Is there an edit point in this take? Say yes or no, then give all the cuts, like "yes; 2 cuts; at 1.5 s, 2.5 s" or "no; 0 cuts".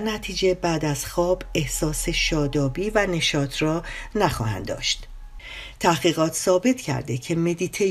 yes; 1 cut; at 5.7 s